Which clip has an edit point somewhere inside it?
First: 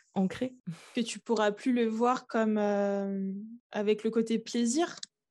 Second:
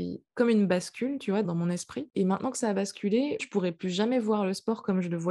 second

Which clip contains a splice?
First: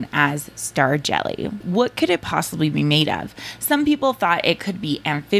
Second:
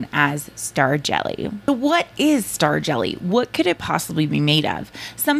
first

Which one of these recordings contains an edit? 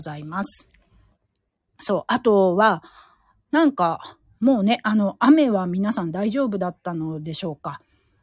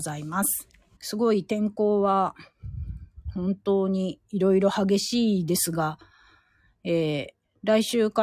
second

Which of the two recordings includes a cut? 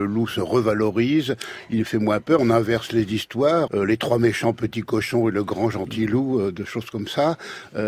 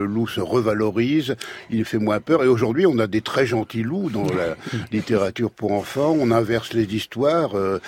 first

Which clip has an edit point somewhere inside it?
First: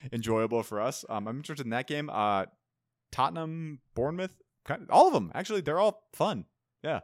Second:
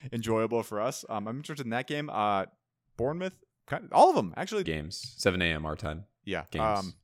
second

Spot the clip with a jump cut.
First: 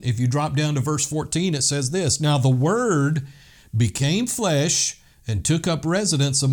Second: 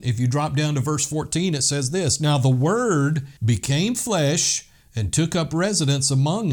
second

